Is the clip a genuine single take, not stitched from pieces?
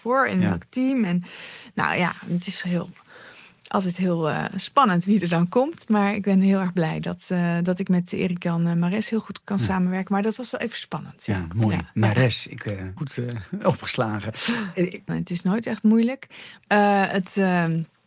no; 3 cuts; at 13.0 s, 15.1 s, 16.6 s

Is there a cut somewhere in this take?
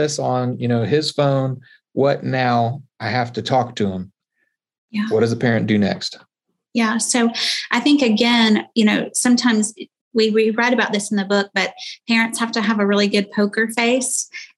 no; 0 cuts

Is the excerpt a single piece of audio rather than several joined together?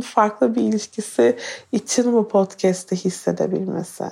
yes; 0 cuts

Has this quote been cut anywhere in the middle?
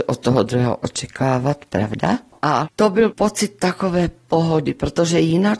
no; 0 cuts

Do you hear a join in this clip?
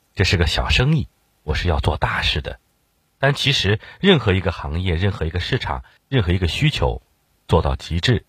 no; 0 cuts

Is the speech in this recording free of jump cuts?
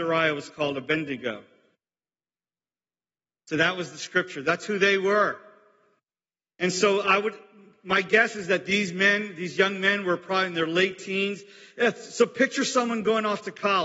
yes; 0 cuts

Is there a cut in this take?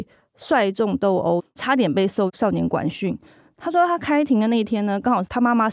yes; 1 cut; at 1.4 s

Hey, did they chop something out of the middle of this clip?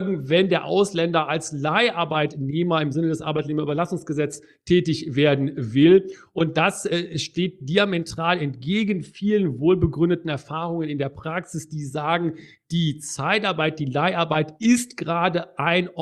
no; 0 cuts

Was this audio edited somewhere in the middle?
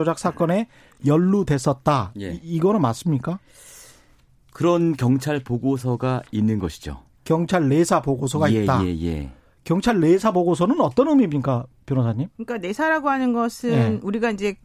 yes; 1 cut; at 12.3 s

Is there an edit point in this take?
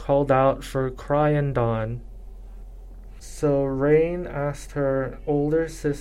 yes; 1 cut; at 3.2 s

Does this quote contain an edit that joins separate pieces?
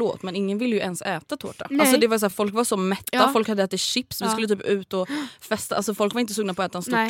no; 0 cuts

